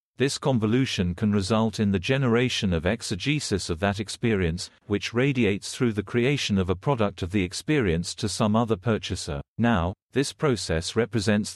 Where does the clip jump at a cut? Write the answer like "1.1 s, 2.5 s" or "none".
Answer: 4.8 s, 9.5 s

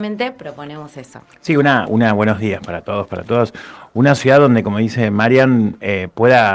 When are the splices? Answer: 1.9 s

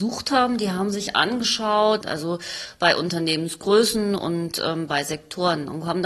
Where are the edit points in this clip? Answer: 2.0 s

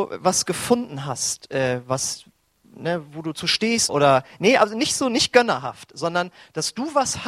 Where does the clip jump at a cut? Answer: 3.9 s

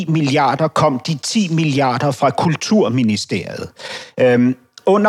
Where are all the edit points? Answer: none

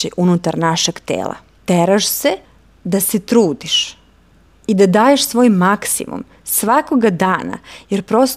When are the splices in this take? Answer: 1.6 s

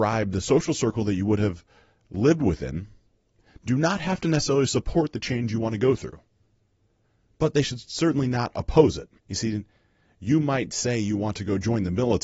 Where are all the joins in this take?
9.2 s

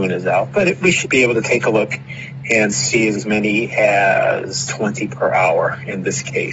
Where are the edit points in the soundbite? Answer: 1.0 s, 3.2 s

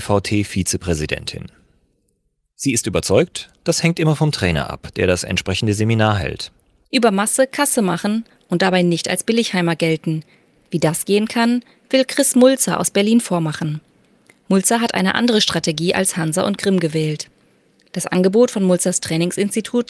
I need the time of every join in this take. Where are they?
none

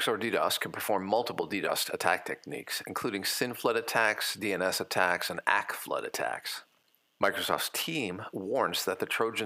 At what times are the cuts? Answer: none

